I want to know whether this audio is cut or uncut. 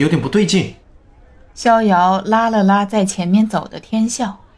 uncut